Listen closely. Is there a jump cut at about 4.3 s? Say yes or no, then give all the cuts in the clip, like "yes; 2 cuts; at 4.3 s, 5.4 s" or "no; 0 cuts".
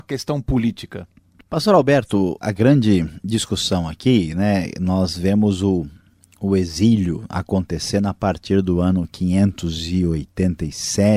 no; 1 cut; at 2.4 s